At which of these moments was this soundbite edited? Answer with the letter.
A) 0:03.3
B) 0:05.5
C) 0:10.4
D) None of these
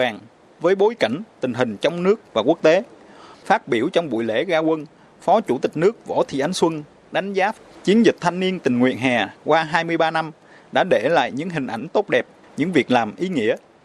A